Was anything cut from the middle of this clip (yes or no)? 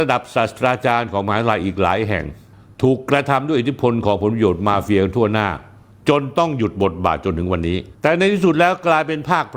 no